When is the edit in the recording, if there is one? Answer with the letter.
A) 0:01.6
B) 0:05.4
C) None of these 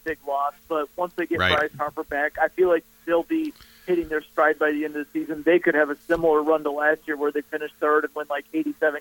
C